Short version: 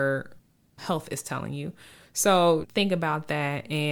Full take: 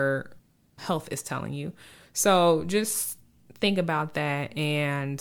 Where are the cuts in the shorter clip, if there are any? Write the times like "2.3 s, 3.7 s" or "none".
2.6 s